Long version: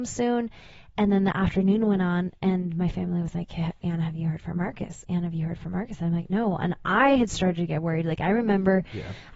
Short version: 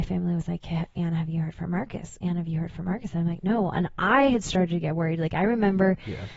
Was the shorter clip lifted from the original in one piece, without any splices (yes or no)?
yes